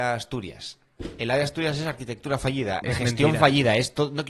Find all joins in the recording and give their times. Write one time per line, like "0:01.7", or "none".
0:02.8